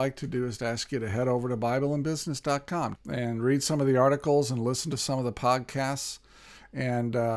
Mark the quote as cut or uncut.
cut